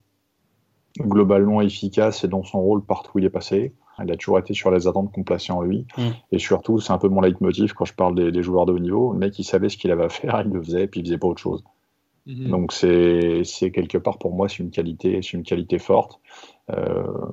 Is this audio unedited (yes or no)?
no